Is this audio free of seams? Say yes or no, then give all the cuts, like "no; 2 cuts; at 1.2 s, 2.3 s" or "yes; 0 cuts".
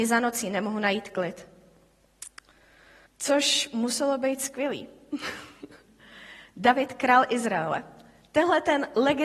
no; 1 cut; at 3.1 s